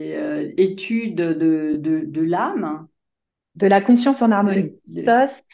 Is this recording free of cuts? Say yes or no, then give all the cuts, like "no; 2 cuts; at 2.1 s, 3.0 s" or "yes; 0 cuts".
yes; 0 cuts